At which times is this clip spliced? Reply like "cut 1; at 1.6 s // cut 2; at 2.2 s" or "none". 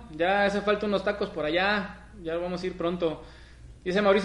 none